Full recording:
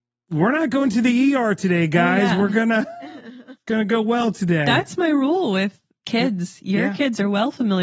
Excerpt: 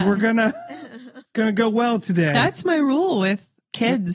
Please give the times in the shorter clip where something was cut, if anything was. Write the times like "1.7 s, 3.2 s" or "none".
none